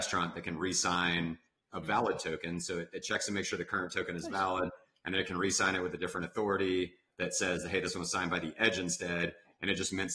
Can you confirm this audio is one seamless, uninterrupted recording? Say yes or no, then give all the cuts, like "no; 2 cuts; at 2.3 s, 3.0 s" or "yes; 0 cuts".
yes; 0 cuts